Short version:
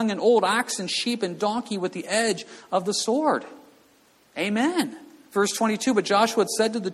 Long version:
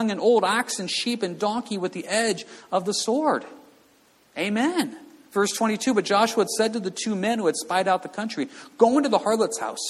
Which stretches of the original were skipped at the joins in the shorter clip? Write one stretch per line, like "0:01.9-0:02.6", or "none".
none